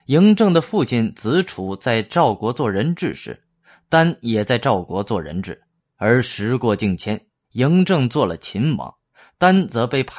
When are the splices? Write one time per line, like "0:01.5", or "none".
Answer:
0:05.8

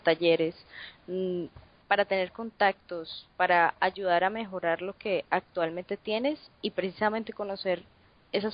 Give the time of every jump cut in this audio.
0:01.8

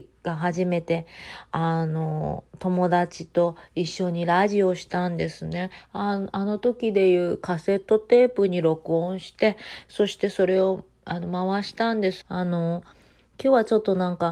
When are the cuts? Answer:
0:12.2

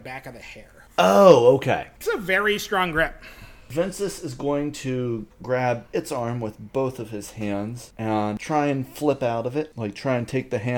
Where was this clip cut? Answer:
none

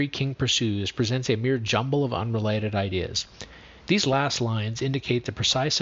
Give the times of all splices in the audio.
0:03.8

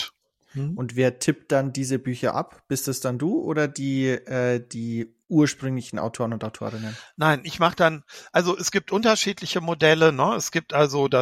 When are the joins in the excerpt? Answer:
none

